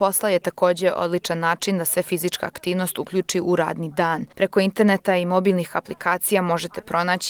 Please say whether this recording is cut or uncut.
cut